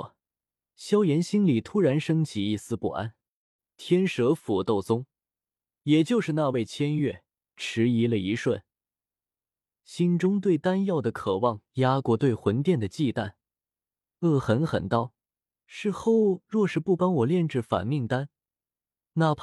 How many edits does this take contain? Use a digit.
1